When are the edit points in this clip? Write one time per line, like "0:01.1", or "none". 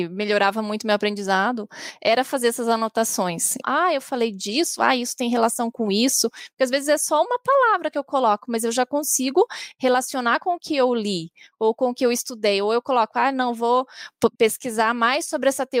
0:03.6
0:14.4